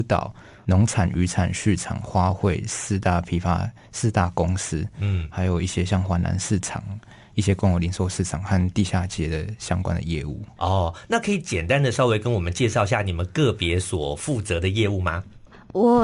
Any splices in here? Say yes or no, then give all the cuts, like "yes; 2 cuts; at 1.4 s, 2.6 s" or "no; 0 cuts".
no; 0 cuts